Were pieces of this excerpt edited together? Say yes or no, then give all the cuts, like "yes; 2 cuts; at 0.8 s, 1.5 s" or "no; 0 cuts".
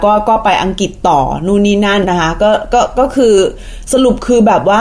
yes; 1 cut; at 2.0 s